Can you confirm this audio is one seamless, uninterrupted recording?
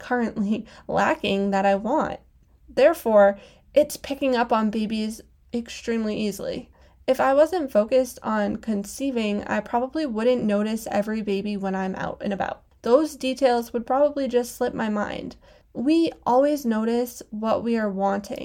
yes; 0 cuts

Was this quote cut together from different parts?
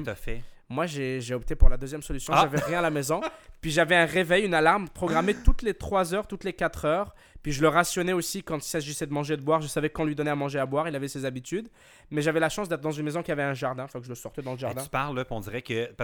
no; 0 cuts

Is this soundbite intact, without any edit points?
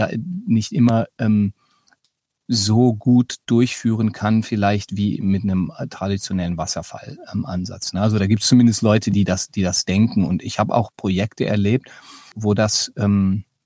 no; 1 cut; at 12.3 s

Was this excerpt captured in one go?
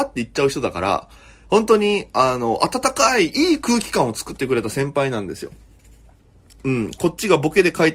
yes; 0 cuts

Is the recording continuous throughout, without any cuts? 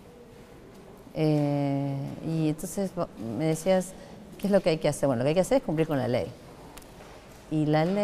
yes; 0 cuts

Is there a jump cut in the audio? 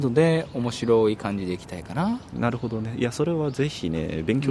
no; 0 cuts

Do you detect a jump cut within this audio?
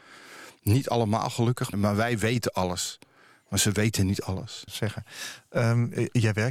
yes; 2 cuts; at 1.7 s, 4.7 s

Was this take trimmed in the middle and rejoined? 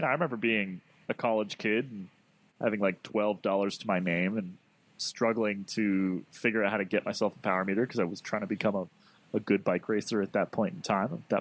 no; 0 cuts

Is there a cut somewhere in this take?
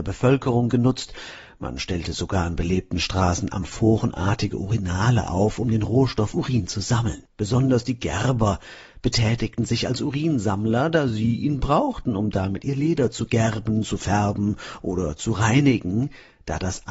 no; 0 cuts

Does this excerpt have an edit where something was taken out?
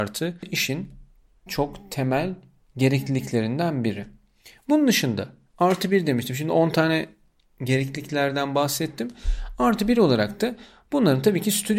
yes; 1 cut; at 1.5 s

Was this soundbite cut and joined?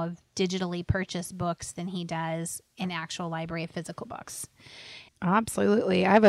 yes; 1 cut; at 5.1 s

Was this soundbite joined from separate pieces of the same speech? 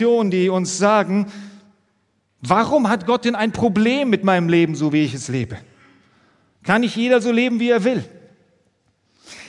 no; 0 cuts

